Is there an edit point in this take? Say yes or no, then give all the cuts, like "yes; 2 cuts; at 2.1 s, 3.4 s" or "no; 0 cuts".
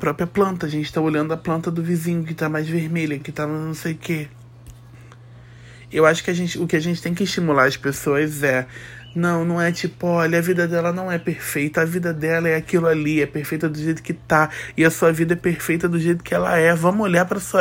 yes; 1 cut; at 3.2 s